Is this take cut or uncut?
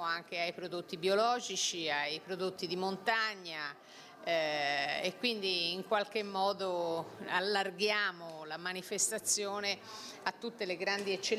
uncut